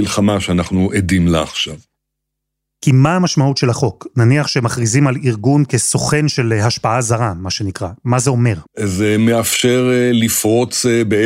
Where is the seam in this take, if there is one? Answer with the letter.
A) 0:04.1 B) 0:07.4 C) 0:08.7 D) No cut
C